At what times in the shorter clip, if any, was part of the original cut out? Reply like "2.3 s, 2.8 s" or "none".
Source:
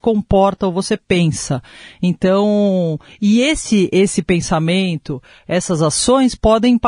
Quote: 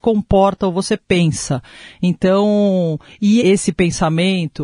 3.4 s